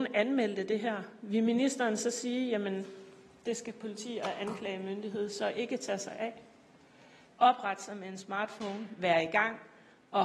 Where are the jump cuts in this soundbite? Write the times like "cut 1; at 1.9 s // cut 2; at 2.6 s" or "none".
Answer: cut 1; at 7.3 s